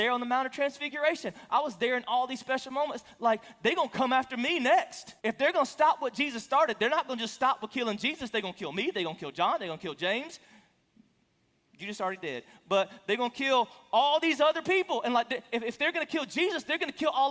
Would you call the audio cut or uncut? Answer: cut